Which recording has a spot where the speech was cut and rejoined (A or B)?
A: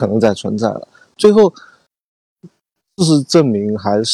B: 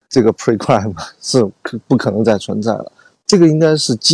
B